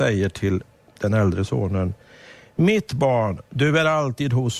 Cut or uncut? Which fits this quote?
uncut